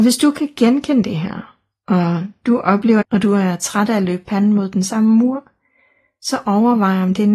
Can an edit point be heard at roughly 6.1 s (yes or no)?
no